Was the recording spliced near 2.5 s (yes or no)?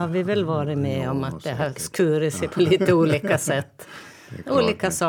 no